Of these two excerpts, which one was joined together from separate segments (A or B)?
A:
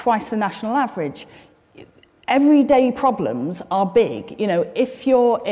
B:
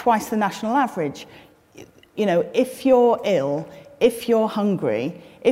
B